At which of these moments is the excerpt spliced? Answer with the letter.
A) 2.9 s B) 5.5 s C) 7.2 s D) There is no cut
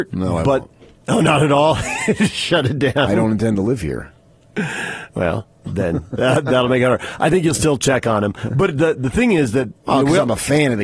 D